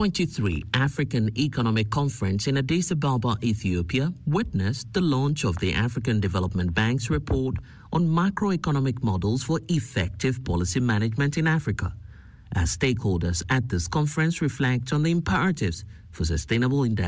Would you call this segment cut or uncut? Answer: uncut